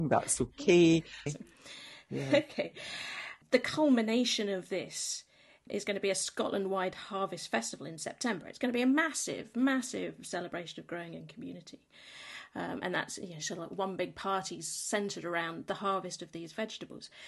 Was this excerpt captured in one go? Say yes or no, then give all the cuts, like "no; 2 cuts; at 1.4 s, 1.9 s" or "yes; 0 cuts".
no; 1 cut; at 1.3 s